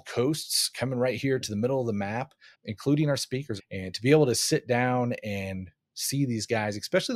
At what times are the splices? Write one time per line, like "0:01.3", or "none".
0:02.5
0:03.6